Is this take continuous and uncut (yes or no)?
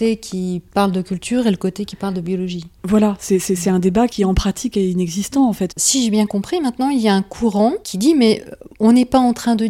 no